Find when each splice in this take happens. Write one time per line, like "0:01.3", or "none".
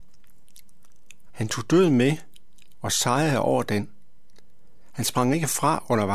0:01.3